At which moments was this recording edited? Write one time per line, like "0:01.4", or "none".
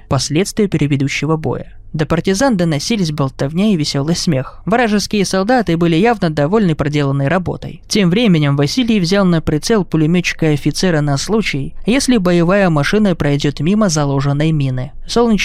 none